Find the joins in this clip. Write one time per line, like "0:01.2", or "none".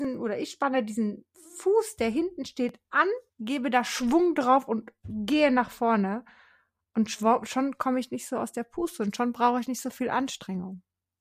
0:03.3